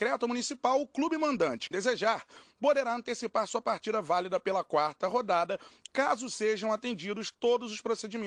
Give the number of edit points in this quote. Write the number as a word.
one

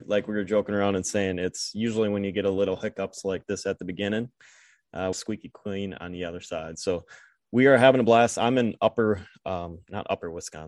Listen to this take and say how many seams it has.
one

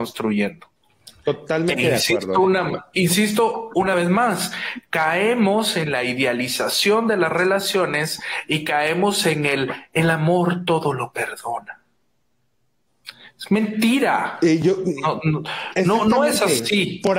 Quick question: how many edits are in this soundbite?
zero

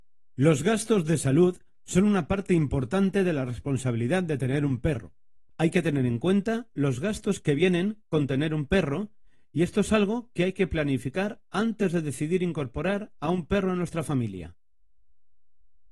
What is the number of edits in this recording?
one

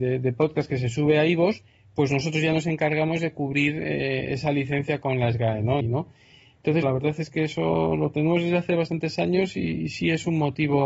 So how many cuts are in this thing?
two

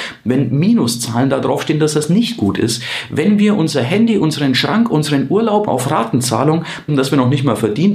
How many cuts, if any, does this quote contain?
two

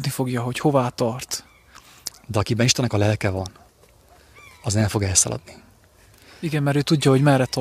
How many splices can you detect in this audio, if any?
one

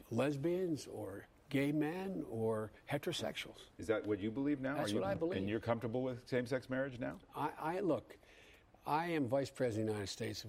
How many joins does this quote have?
zero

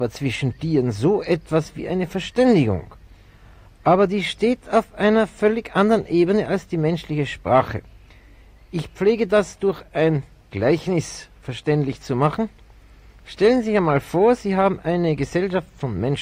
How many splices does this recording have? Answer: zero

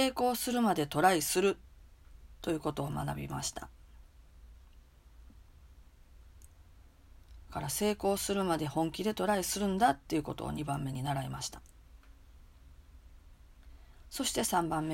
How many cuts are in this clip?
one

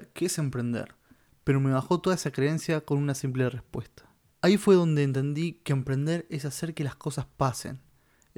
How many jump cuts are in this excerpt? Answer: two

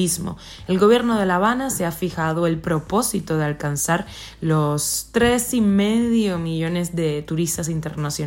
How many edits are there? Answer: zero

